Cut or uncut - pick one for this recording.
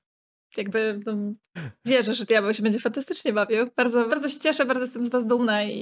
cut